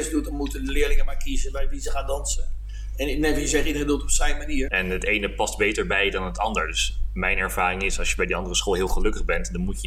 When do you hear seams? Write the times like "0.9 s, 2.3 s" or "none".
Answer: 4.7 s